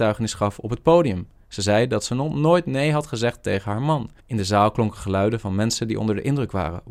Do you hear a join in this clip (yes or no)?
yes